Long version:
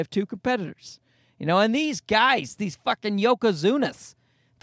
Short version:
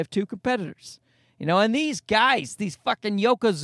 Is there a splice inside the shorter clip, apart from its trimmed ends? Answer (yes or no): no